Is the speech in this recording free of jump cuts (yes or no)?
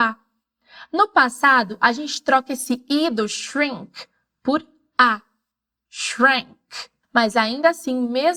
no